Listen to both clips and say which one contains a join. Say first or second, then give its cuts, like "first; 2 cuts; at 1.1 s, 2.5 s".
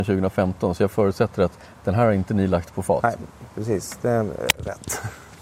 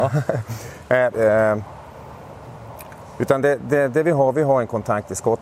second; 1 cut; at 1.1 s